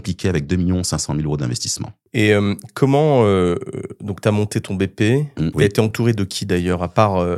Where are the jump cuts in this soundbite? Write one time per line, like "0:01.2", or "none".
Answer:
0:05.5